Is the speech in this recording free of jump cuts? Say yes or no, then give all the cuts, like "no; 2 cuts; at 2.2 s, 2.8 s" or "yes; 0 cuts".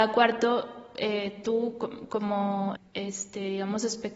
no; 1 cut; at 2.8 s